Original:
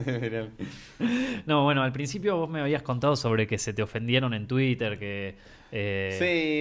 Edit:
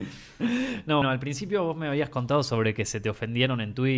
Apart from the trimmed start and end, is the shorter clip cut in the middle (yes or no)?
yes